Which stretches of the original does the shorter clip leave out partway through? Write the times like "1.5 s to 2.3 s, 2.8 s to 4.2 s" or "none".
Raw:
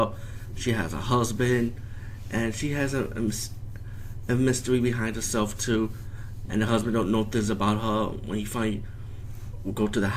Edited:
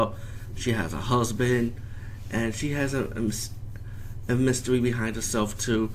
none

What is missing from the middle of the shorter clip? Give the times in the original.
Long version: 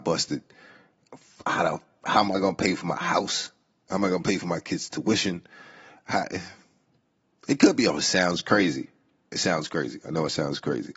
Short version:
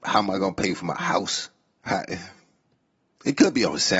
3.8 s to 6.0 s

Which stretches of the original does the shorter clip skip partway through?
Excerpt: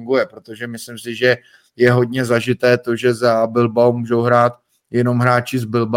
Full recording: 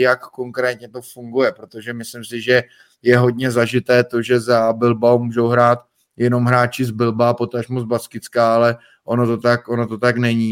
none

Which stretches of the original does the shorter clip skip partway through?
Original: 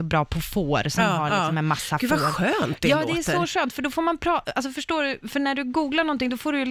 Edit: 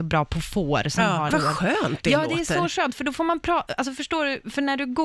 1.3 s to 2.1 s

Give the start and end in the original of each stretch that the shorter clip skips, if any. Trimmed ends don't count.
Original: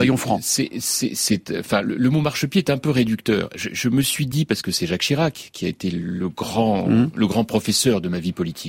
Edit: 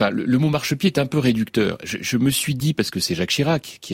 none

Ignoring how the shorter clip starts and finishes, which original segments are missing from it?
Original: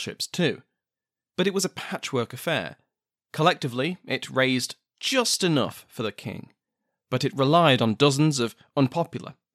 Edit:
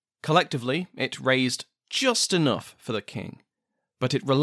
none

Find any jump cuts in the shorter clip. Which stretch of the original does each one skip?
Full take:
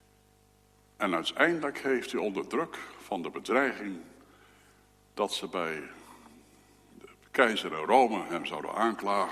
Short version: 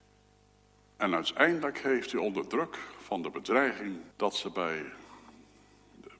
4.1 s to 5.1 s

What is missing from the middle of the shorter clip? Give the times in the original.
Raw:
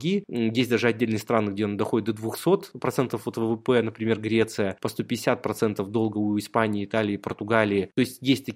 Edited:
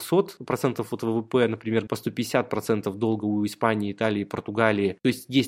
4.2 s to 4.8 s

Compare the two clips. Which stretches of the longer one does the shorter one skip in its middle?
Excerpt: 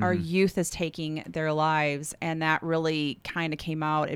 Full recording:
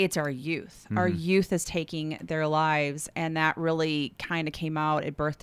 none

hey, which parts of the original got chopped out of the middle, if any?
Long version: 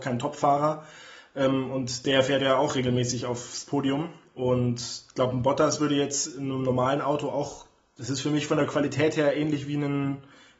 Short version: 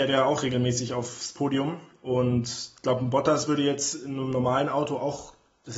none

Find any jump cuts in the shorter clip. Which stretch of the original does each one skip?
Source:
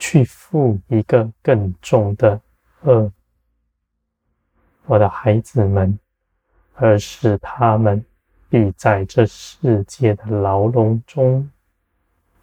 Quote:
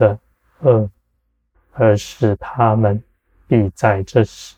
3.8 s to 6.6 s

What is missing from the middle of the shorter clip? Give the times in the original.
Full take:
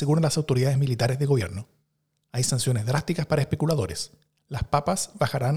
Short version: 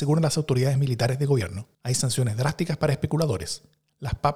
1.7 s to 2.2 s

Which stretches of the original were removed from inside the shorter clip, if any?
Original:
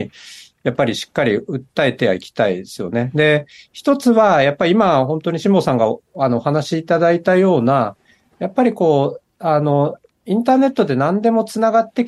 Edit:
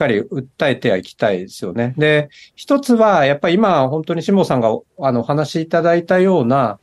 none

